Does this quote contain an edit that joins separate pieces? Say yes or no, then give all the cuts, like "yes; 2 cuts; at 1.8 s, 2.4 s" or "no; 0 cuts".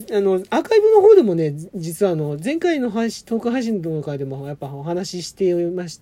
no; 0 cuts